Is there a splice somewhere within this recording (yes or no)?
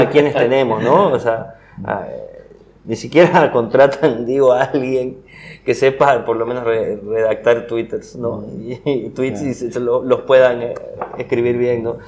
no